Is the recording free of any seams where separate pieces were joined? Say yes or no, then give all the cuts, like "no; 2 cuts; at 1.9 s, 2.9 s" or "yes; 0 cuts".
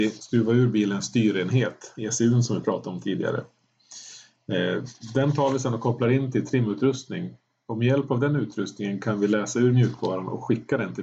yes; 0 cuts